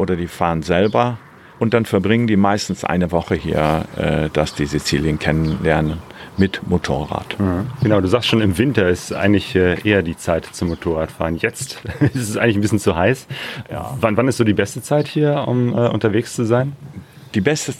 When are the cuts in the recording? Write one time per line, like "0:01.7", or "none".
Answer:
0:11.8